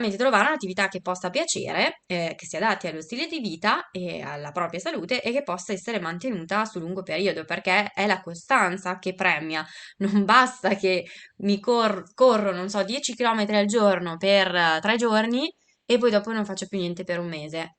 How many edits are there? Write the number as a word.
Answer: zero